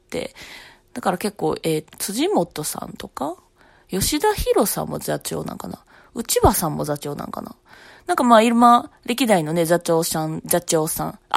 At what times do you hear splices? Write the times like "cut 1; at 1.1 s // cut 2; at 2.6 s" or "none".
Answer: cut 1; at 1.9 s